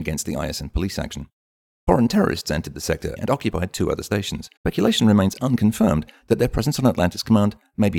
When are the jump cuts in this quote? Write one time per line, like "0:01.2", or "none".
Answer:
0:03.2
0:04.6